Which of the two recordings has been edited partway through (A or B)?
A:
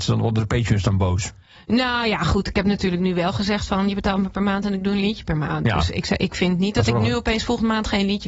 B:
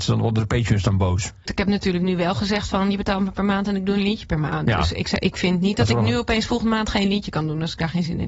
B